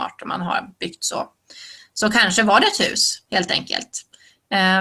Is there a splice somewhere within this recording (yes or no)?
no